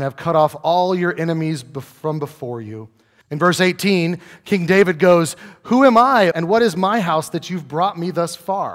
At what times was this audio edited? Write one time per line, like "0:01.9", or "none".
0:03.2
0:06.3